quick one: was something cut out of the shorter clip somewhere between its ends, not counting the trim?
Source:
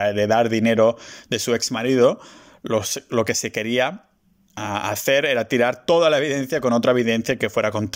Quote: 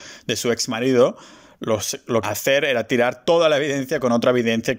yes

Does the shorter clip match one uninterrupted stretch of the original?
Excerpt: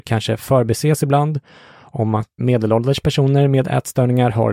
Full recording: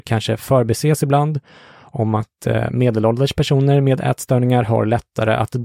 no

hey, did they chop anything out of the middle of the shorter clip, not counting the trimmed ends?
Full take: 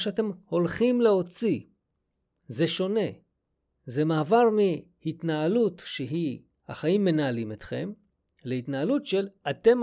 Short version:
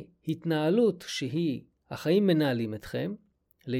no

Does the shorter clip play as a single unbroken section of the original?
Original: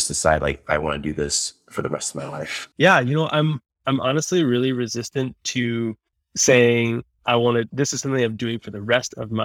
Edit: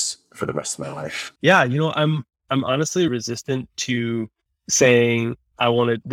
no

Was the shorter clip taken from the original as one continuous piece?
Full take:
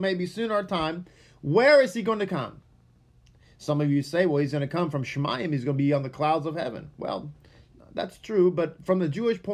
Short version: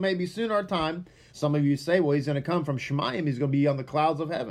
no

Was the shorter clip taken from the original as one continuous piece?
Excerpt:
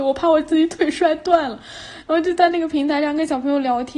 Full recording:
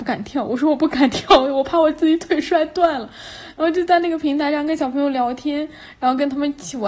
yes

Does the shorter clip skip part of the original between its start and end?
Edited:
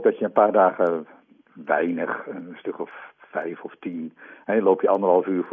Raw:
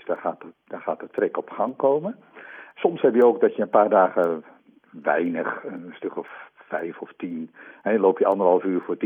no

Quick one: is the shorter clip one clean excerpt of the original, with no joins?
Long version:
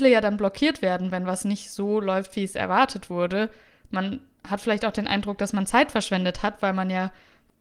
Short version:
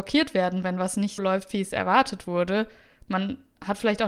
no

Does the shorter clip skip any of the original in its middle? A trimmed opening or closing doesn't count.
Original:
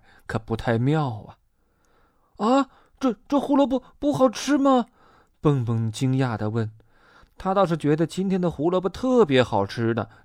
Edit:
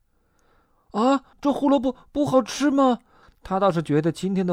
yes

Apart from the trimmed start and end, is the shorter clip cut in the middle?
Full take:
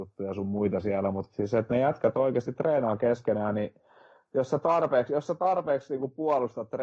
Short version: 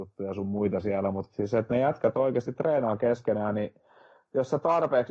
no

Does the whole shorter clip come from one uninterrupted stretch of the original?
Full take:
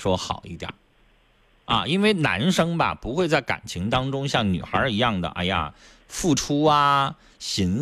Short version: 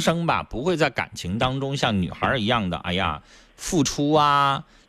yes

